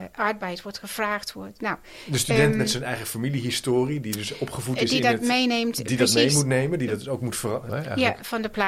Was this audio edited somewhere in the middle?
yes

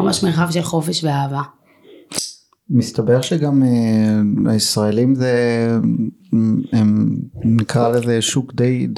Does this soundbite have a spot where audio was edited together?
no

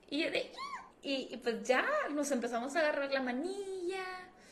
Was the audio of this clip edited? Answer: yes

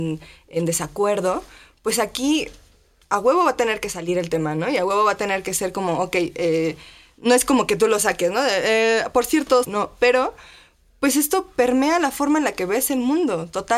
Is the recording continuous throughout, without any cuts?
no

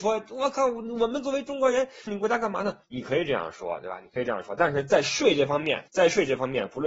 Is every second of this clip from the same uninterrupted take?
no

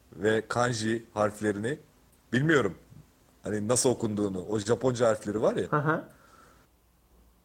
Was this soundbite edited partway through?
no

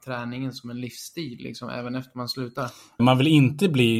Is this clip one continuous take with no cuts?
no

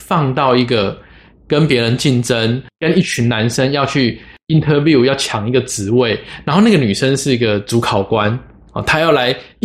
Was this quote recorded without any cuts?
yes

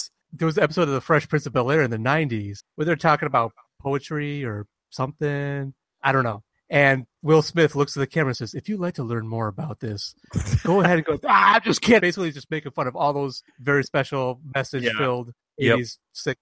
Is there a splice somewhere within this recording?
yes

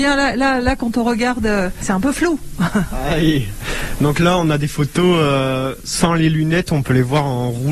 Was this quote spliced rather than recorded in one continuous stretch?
no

